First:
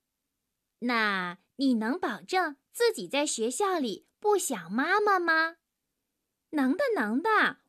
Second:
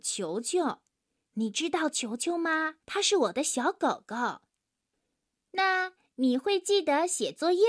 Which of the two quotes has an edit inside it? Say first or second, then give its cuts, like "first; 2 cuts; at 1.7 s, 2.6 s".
second; 1 cut; at 2.8 s